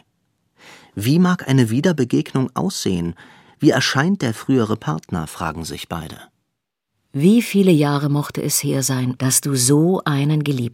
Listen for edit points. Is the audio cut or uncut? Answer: cut